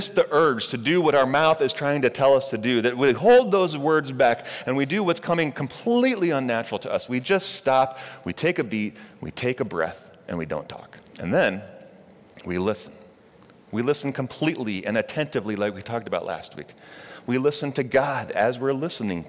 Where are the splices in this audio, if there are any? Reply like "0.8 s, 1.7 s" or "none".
11.1 s, 13.5 s